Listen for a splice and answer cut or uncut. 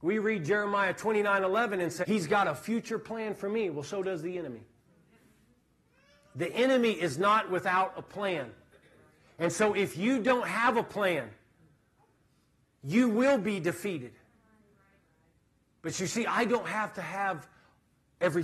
cut